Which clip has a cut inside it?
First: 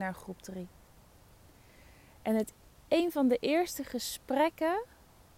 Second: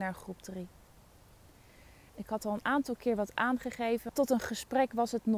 second; 2 cuts; at 2.1 s, 4.1 s

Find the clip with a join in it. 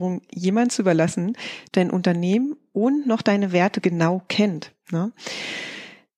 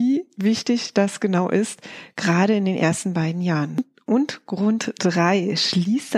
first; 1 cut; at 1.7 s

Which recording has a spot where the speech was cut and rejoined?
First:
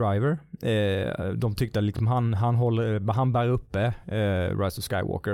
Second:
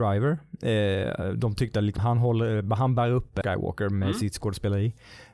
second; 2 cuts; at 2.0 s, 3.4 s

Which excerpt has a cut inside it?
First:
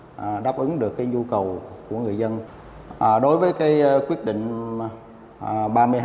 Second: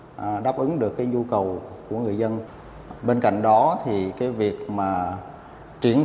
second; 1 cut; at 3.0 s

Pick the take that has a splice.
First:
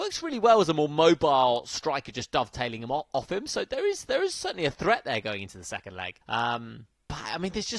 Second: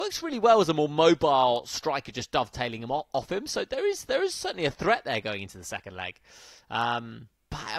first; 1 cut; at 6.2 s

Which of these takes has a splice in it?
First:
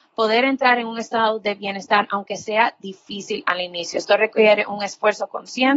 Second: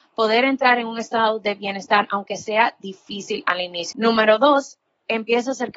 second; 1 cut; at 3.9 s

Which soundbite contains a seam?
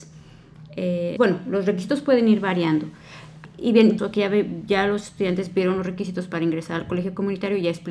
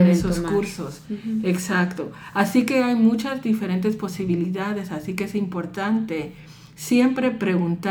first; 2 cuts; at 1.2 s, 4.0 s

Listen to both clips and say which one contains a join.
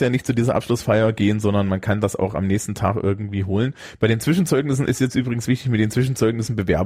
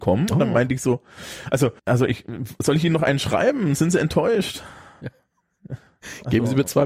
second; 1 cut; at 1.8 s

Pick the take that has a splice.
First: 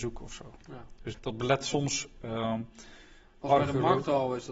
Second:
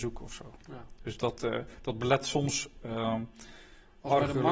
first; 1 cut; at 1.1 s

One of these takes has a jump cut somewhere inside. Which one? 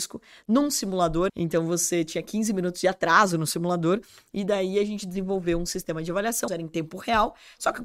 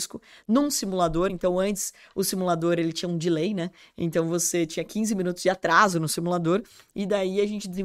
first; 2 cuts; at 1.3 s, 6.5 s

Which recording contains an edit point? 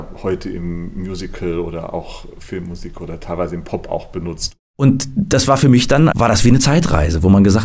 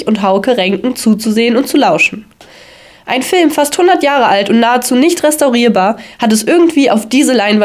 first; 2 cuts; at 4.7 s, 6.1 s

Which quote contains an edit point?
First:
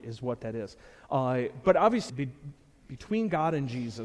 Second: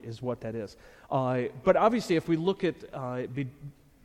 first; 1 cut; at 2.1 s

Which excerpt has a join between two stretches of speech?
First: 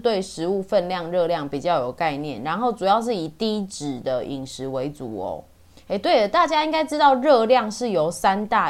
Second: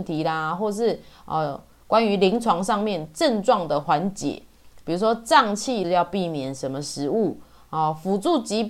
second; 2 cuts; at 3.8 s, 5.8 s

